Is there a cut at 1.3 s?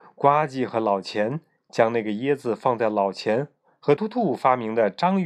no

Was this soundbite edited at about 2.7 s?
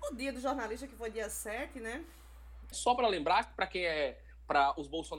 yes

